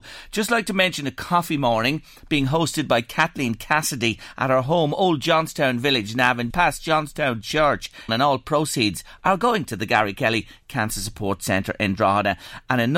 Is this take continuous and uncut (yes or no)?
no